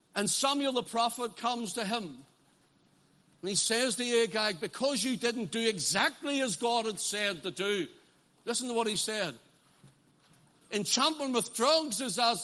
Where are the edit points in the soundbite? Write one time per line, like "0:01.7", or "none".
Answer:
0:10.6